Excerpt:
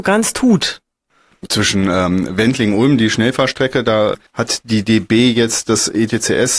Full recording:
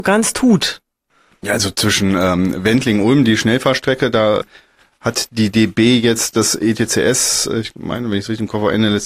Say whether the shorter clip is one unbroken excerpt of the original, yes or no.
no